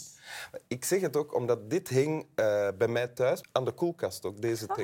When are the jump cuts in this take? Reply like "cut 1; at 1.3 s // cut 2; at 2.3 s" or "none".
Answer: cut 1; at 3.4 s